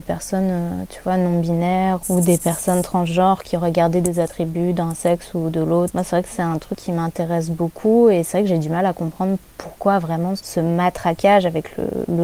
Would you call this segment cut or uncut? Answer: cut